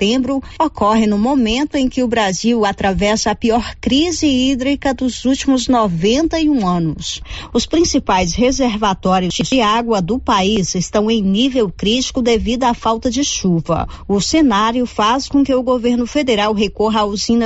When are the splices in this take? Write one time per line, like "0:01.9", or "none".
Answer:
none